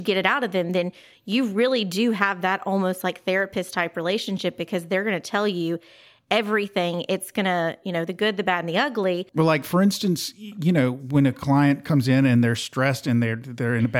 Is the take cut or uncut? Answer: uncut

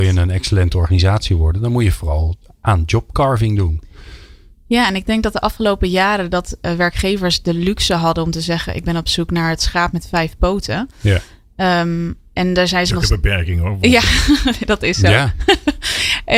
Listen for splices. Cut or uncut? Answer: uncut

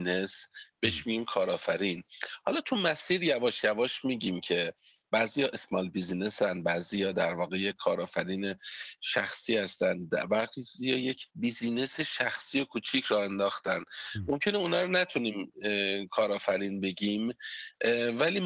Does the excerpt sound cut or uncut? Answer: cut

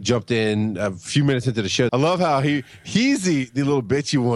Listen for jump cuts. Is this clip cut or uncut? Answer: cut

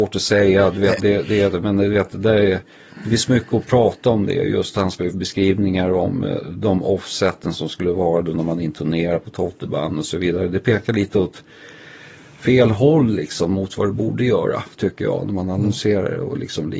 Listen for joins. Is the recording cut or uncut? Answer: cut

